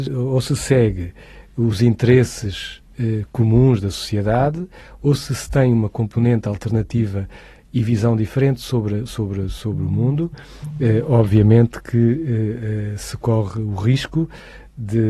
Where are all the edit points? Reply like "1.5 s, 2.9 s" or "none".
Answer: 9.1 s